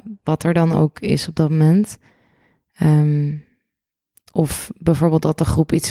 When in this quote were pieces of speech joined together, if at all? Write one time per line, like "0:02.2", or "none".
none